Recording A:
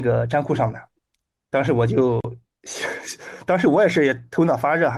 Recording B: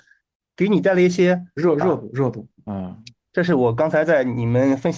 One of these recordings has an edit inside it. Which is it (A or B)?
B